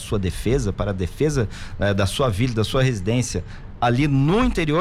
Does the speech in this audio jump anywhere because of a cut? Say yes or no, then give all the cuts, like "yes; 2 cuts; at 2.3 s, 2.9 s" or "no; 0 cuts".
no; 0 cuts